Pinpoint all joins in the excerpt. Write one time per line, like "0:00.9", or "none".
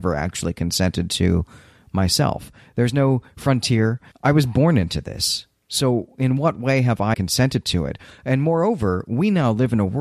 0:04.1
0:07.1